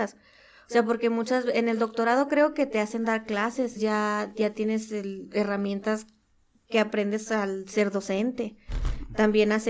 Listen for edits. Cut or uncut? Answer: cut